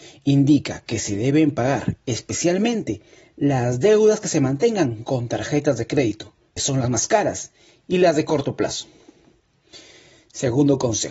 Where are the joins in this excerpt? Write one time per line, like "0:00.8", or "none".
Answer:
0:06.6